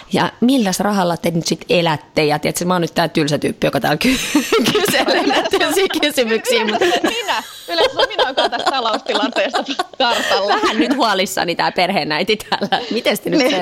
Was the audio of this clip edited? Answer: no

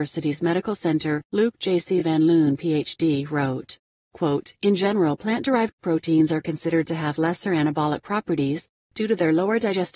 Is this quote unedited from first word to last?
yes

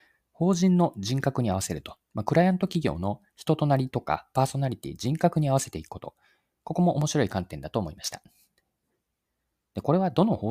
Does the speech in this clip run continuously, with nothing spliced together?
yes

